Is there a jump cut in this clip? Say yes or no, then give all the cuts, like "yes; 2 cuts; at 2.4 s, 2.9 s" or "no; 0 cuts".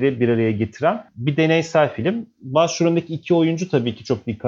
no; 0 cuts